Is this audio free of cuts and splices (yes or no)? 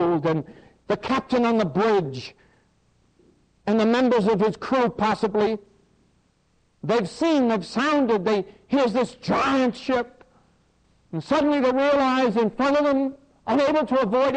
yes